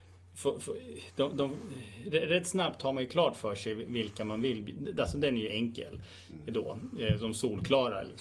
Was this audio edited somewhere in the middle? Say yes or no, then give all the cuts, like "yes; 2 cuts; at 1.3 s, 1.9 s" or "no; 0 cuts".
no; 0 cuts